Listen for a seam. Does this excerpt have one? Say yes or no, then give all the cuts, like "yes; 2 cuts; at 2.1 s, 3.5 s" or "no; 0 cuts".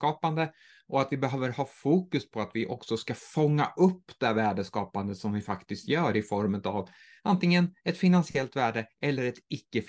no; 0 cuts